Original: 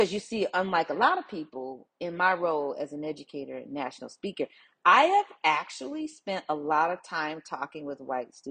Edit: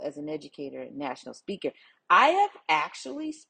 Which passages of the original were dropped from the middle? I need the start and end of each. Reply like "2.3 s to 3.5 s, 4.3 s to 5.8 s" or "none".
none